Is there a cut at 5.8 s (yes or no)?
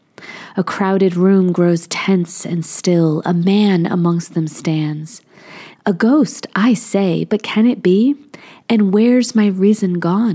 yes